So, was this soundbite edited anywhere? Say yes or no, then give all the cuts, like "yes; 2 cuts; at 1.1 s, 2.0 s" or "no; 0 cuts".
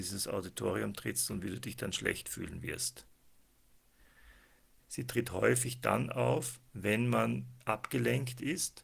yes; 2 cuts; at 4.8 s, 6.7 s